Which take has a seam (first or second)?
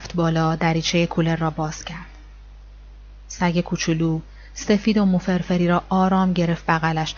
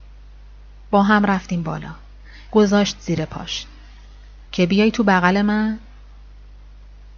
second